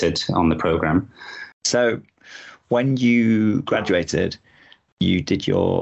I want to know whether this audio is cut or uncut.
cut